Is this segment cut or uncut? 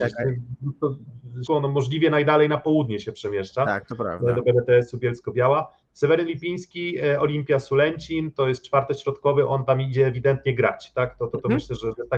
cut